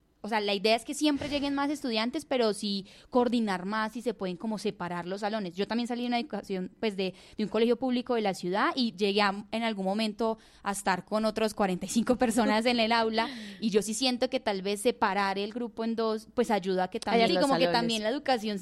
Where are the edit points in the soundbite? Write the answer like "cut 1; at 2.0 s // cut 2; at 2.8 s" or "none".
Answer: cut 1; at 17.3 s